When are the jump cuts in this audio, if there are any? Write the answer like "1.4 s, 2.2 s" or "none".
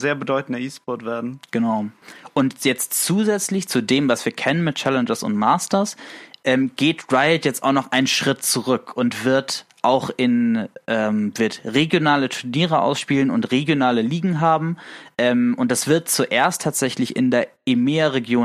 none